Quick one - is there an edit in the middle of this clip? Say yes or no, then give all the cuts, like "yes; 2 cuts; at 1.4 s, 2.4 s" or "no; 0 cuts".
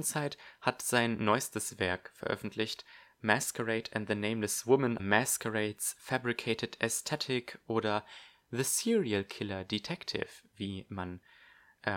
yes; 1 cut; at 5.0 s